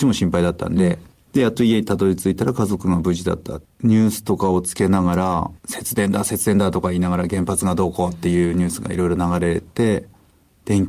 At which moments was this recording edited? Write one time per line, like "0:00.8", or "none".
0:03.7
0:05.6